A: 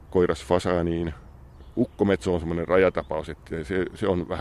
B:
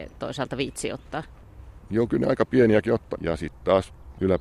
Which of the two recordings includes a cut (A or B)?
B